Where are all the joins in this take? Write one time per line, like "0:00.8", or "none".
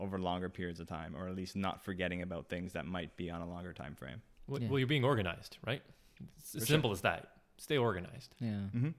none